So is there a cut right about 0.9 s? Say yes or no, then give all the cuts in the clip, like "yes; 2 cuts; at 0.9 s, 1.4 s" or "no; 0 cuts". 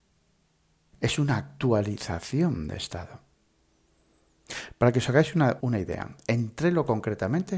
yes; 2 cuts; at 0.9 s, 5.6 s